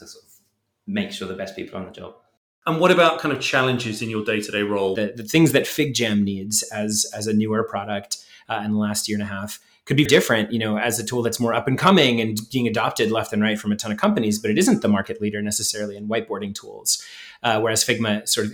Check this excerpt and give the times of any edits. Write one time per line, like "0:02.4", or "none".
0:05.0
0:10.1